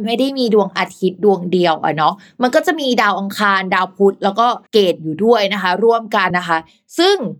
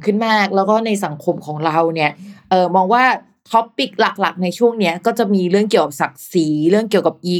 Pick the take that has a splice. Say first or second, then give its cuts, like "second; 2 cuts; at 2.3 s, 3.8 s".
first; 2 cuts; at 4.7 s, 6.3 s